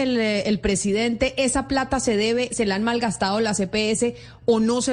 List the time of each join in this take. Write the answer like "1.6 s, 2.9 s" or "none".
2.5 s